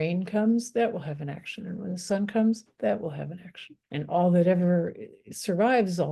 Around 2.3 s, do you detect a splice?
no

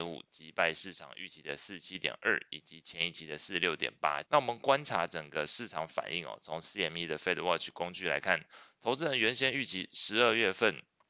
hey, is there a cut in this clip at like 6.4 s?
no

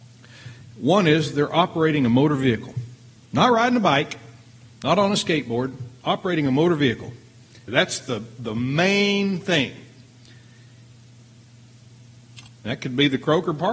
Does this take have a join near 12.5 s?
yes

